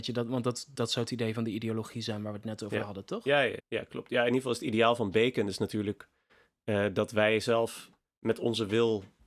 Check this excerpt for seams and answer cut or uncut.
cut